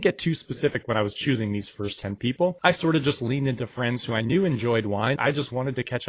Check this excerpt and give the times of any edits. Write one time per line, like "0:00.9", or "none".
0:05.2